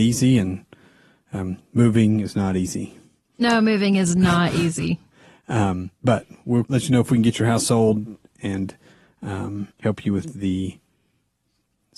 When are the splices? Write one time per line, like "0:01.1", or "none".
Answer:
0:06.6
0:09.7